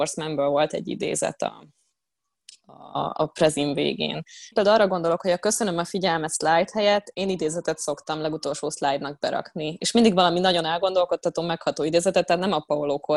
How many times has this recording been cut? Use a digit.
1